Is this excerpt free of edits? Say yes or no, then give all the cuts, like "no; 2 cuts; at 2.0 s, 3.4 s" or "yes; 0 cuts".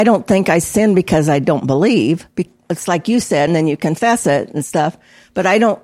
no; 2 cuts; at 2.3 s, 3.5 s